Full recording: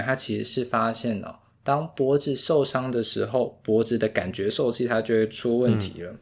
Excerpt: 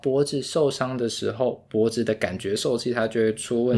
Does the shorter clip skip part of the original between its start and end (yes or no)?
no